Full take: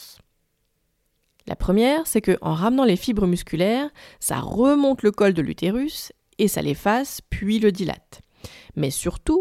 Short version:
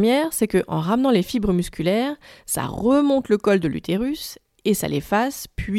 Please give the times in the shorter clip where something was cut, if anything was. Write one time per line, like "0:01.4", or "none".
none